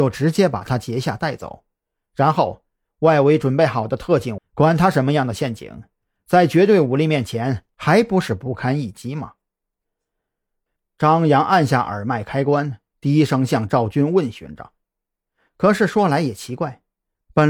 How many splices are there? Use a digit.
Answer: 2